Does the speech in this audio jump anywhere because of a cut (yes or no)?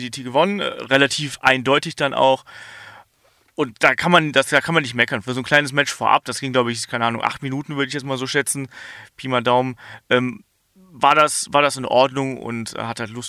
no